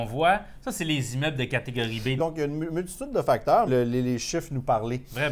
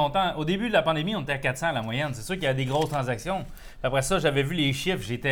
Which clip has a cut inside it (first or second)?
first